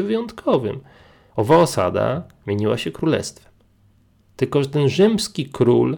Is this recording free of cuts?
no; 1 cut; at 1.3 s

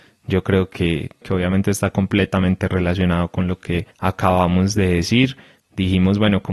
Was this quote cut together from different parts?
yes; 2 cuts; at 1.2 s, 3.9 s

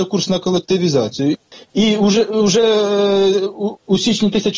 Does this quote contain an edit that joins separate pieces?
no; 0 cuts

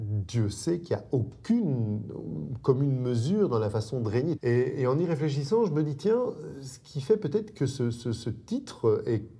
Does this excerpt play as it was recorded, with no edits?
no; 1 cut; at 4.4 s

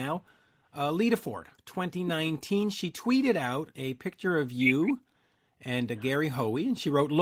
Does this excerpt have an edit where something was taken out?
yes; 1 cut; at 1.5 s

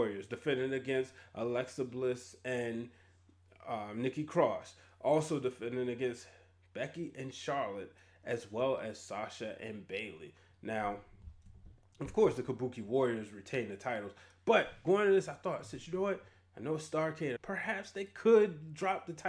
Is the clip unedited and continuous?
no; 1 cut; at 17.4 s

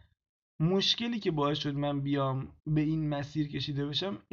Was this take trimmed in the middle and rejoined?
yes; 1 cut; at 2.6 s

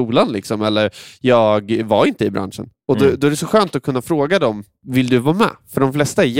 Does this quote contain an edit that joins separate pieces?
no; 0 cuts

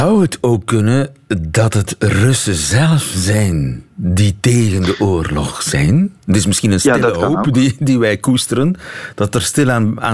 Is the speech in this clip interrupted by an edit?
yes; 1 cut; at 6.2 s

